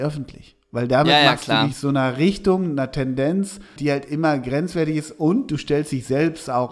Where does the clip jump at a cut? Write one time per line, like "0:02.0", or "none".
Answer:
0:03.8